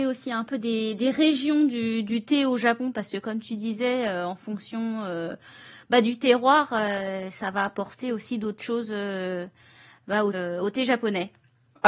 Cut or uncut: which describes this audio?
cut